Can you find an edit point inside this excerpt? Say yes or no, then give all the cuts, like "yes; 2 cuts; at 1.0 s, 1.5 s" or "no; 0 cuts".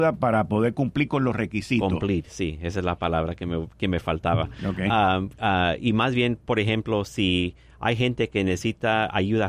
no; 0 cuts